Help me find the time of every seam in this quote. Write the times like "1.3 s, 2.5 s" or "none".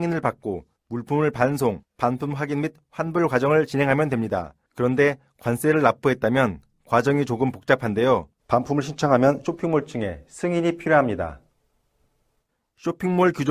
8.4 s